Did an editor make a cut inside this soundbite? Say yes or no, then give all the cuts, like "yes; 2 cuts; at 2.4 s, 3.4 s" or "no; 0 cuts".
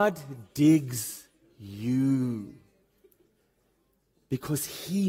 no; 0 cuts